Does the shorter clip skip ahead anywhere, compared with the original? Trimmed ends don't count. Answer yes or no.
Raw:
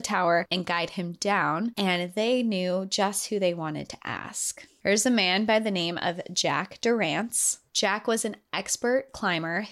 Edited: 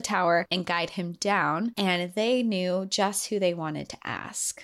no